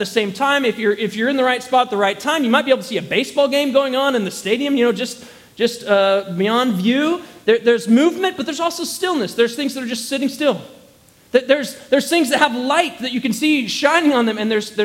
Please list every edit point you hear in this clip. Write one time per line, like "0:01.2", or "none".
none